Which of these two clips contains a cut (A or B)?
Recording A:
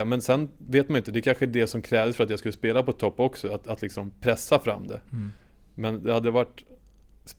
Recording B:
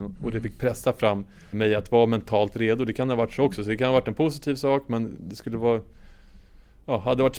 B